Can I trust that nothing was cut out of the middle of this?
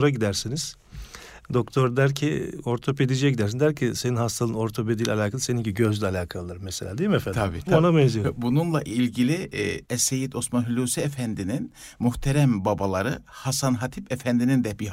no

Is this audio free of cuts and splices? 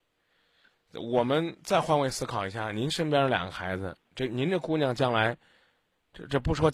yes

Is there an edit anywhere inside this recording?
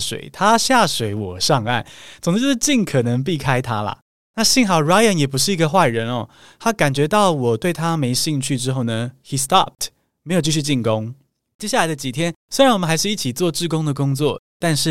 no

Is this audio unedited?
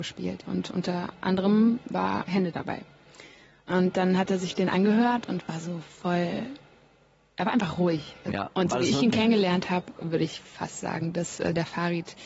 no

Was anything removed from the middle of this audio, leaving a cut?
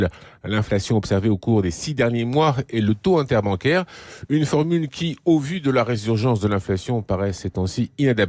no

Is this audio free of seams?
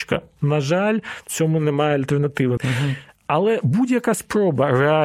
no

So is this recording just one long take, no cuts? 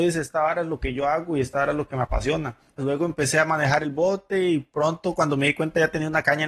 no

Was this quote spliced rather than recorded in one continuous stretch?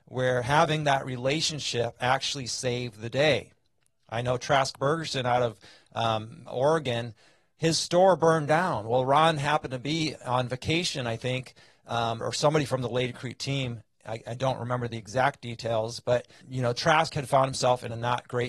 yes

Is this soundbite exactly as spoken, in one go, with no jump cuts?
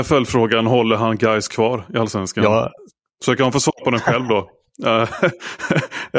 yes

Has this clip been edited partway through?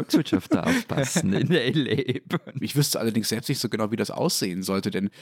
yes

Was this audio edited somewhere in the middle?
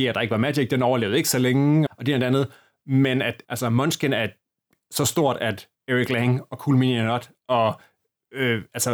yes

